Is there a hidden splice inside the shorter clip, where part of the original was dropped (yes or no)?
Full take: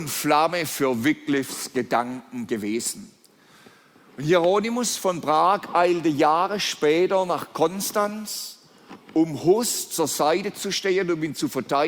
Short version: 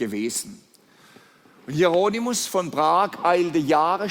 no